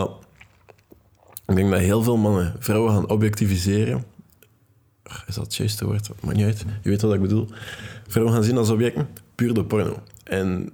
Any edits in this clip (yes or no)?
no